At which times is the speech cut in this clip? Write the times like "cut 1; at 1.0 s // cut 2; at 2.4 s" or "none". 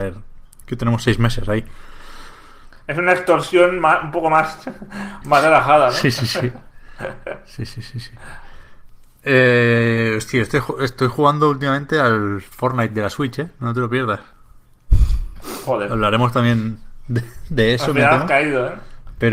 none

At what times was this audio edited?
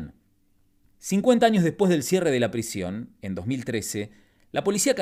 cut 1; at 0.9 s

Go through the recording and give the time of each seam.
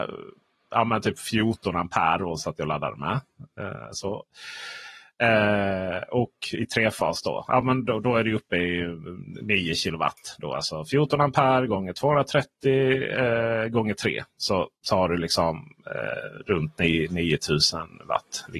none

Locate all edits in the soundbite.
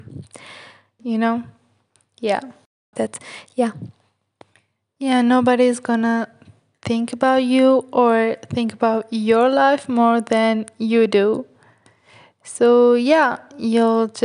cut 1; at 1.0 s // cut 2; at 2.9 s

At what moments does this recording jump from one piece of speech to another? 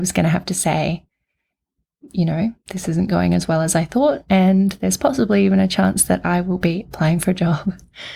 none

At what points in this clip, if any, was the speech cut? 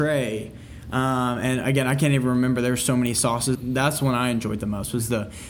cut 1; at 3.5 s

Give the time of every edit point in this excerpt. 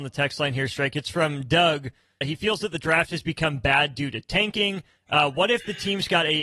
cut 1; at 2.2 s

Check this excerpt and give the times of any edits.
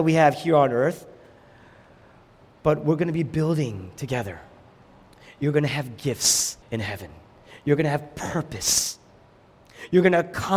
cut 1; at 6.6 s

